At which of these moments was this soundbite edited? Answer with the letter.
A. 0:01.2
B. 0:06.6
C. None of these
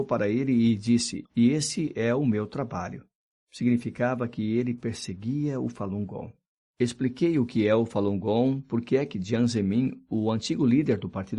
A